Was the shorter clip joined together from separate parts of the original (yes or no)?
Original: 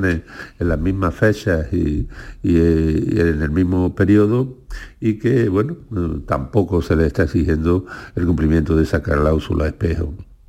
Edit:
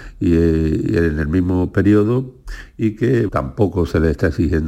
yes